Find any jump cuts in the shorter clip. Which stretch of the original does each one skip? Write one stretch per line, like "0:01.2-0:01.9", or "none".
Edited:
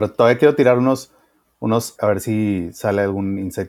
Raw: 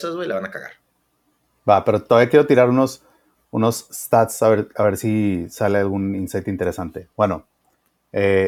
0:03.9-0:04.7